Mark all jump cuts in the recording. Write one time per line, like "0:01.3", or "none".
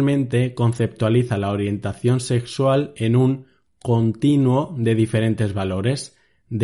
none